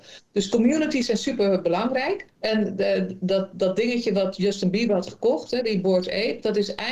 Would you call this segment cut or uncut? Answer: uncut